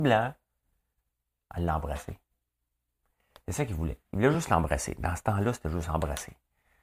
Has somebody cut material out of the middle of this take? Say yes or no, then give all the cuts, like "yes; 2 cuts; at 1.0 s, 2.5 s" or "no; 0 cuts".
no; 0 cuts